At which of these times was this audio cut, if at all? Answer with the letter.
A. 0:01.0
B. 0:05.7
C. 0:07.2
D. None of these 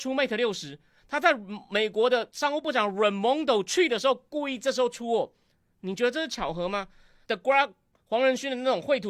C